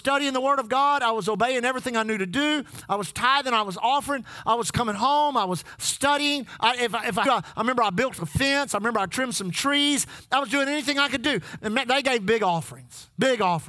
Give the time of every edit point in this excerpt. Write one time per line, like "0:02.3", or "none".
0:07.3
0:11.6